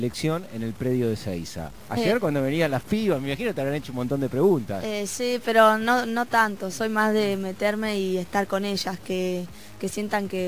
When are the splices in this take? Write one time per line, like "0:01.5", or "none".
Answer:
0:01.8